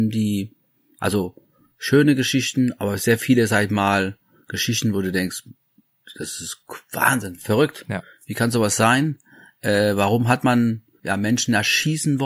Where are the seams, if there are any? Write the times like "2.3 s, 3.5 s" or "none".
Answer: none